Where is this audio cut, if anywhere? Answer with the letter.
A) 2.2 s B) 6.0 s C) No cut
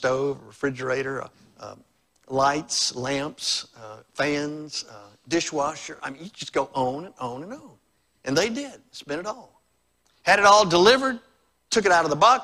C